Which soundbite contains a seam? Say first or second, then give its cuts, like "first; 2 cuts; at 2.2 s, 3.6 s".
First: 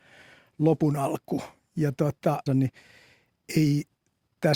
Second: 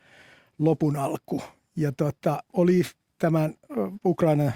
first; 1 cut; at 2.5 s